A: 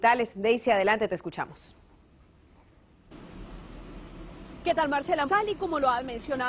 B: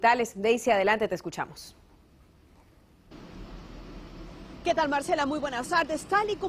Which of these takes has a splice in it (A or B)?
A